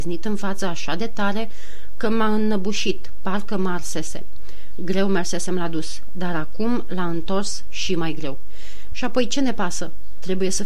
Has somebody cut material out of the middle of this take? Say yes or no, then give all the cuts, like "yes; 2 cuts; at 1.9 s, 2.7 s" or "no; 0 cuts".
yes; 1 cut; at 8.9 s